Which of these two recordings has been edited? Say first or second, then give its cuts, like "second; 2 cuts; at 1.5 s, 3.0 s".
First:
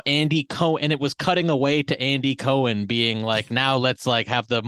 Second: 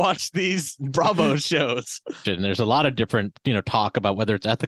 second; 1 cut; at 2.3 s